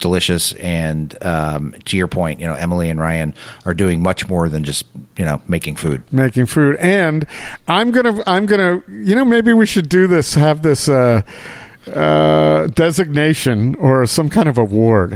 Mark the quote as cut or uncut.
uncut